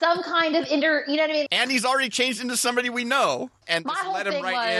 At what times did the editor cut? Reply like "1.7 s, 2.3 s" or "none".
1.5 s, 3.6 s